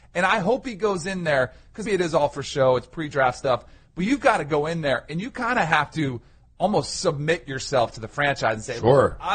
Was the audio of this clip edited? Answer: yes; 1 cut; at 1.8 s

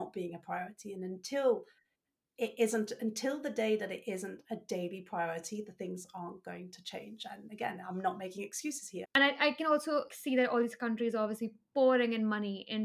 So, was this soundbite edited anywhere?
yes; 2 cuts; at 9.0 s, 10.1 s

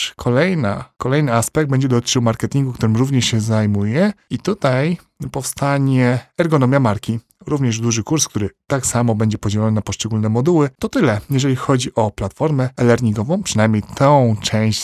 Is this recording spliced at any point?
yes; 1 cut; at 10.8 s

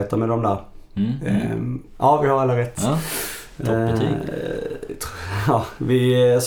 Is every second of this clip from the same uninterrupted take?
no; 1 cut; at 2.0 s

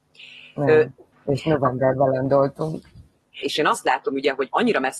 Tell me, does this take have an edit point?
yes; 2 cuts; at 1.1 s, 3.4 s

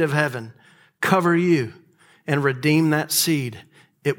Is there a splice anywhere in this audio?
no; 0 cuts

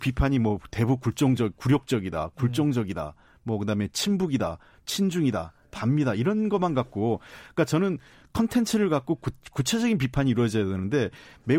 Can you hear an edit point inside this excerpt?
no; 0 cuts

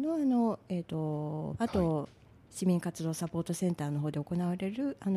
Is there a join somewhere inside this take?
yes; 1 cut; at 1.6 s

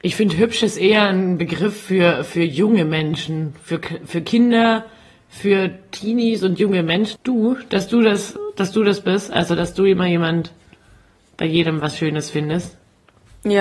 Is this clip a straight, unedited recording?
no; 1 cut; at 7.2 s

